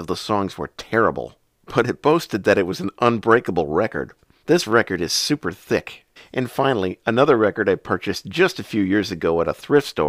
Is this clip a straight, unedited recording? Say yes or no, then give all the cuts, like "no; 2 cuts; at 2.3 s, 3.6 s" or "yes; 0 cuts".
no; 2 cuts; at 4.4 s, 6.2 s